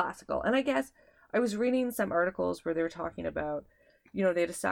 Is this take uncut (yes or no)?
yes